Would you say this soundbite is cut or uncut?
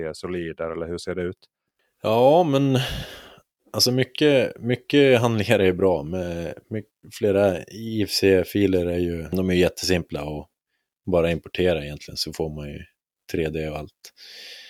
uncut